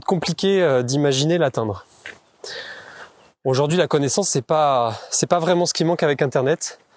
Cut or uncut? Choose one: uncut